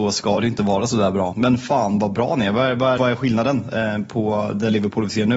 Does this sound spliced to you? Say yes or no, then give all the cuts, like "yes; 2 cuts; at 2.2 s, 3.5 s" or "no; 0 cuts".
yes; 2 cuts; at 1.3 s, 3.0 s